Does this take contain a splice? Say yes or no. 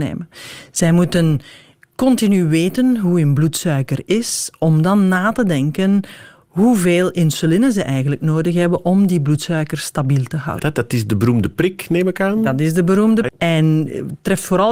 yes